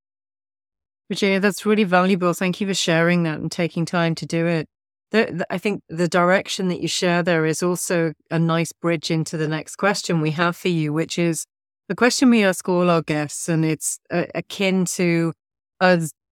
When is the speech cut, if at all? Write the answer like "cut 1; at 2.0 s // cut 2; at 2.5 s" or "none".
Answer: none